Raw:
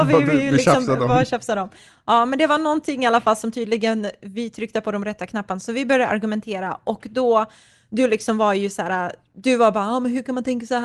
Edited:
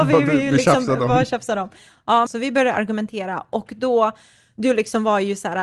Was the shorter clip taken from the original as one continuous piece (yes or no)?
no